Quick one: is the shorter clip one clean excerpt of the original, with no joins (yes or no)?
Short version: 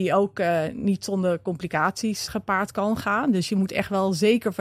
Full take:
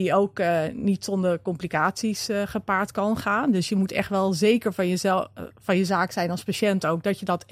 no